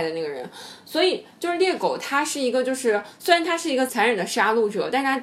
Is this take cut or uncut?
cut